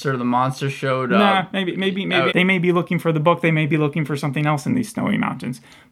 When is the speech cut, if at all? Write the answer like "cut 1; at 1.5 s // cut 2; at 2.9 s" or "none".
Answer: cut 1; at 2.3 s

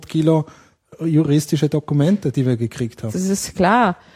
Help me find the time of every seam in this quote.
cut 1; at 3.1 s

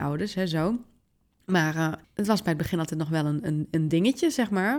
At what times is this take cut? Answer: none

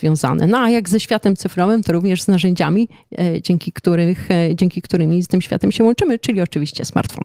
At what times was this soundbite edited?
cut 1; at 5.2 s

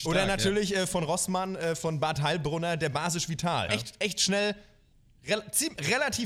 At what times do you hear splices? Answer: cut 1; at 3.7 s

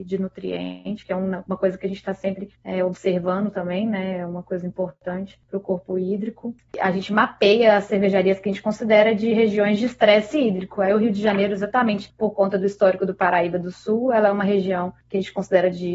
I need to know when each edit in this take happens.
cut 1; at 6.7 s

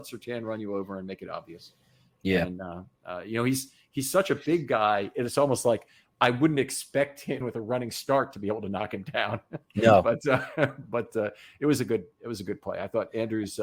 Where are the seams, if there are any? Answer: cut 1; at 7.4 s

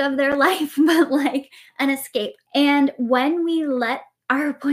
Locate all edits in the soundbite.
cut 1; at 2.5 s

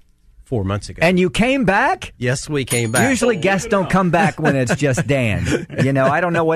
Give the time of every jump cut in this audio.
none

